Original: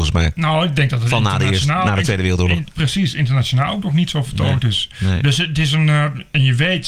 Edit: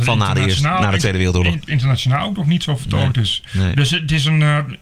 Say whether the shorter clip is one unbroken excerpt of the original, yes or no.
no